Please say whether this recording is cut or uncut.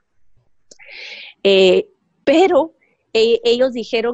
uncut